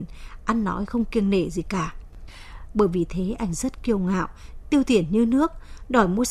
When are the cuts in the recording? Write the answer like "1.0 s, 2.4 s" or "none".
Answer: 2.7 s, 4.6 s